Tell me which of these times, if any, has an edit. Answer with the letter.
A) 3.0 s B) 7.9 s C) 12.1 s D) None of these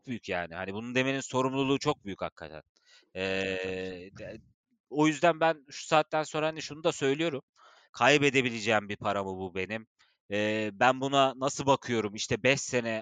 B